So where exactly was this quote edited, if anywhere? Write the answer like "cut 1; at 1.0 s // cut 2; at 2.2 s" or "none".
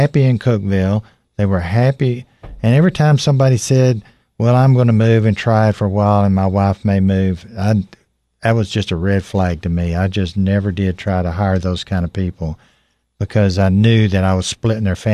none